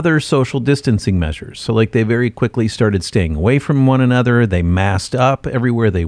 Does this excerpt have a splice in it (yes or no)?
no